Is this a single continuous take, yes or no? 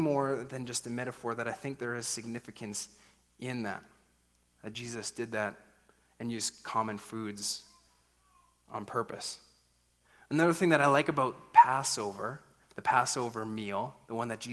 yes